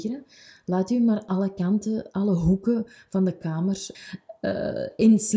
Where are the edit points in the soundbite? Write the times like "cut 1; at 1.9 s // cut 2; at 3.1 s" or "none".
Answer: cut 1; at 3.9 s